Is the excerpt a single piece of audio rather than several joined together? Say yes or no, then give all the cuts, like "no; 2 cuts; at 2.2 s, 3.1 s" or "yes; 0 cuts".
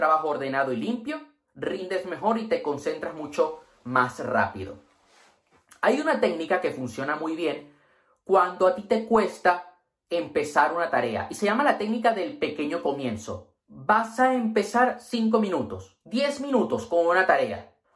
yes; 0 cuts